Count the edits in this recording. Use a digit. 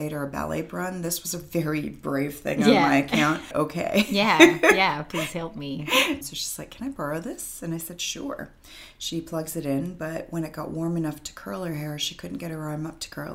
2